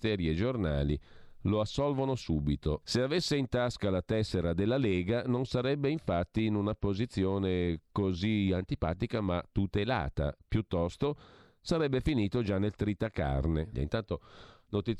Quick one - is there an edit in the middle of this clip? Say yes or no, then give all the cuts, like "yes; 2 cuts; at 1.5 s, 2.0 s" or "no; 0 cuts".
yes; 2 cuts; at 2.8 s, 13.7 s